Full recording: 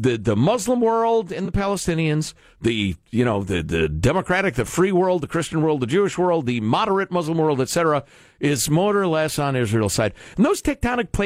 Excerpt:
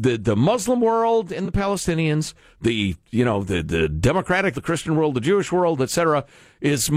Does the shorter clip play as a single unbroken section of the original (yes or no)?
no